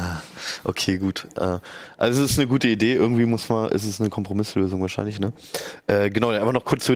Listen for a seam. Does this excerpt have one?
no; 0 cuts

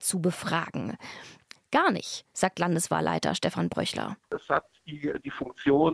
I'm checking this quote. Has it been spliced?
yes; 1 cut; at 1.5 s

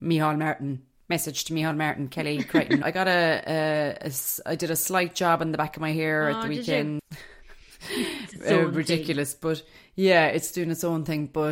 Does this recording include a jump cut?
yes; 2 cuts; at 2.8 s, 7.0 s

